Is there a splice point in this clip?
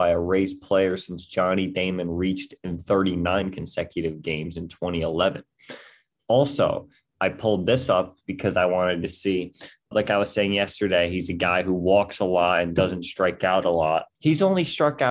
yes; 2 cuts; at 9.9 s, 14.1 s

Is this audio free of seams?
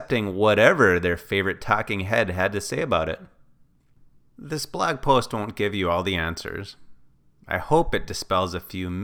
yes; 0 cuts

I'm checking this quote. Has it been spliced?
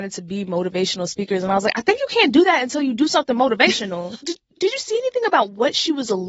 yes; 1 cut; at 4.2 s

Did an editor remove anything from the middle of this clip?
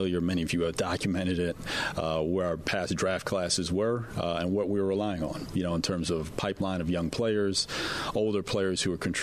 no; 0 cuts

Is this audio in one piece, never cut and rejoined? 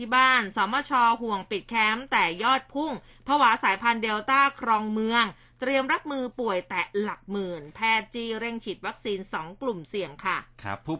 yes; 0 cuts

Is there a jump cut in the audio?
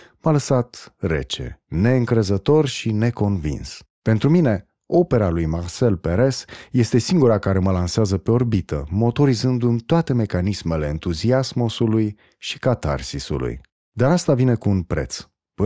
no; 0 cuts

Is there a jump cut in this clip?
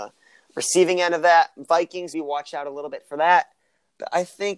yes; 1 cut; at 2.1 s

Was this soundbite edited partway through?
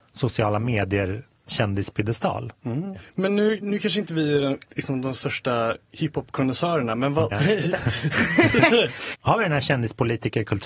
yes; 2 cuts; at 3.6 s, 7.3 s

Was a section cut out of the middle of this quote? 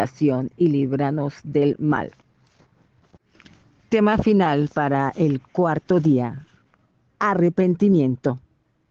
no; 0 cuts

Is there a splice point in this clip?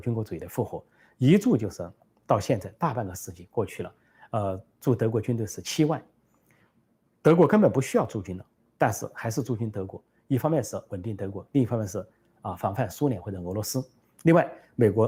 no; 0 cuts

